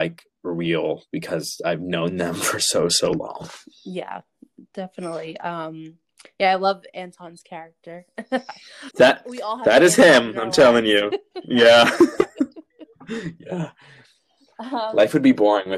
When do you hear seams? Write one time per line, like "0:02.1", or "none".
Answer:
0:08.9